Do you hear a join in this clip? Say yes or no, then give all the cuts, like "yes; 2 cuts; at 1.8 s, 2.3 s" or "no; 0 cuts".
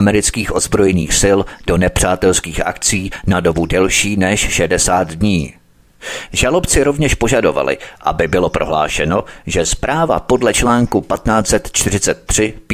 no; 0 cuts